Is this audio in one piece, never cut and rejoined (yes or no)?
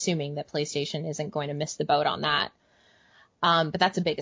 yes